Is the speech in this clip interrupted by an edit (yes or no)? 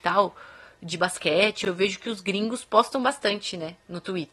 no